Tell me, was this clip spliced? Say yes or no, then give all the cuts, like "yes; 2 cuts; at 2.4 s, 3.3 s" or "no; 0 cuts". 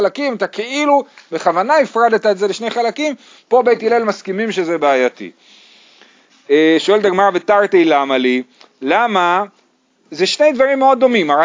no; 0 cuts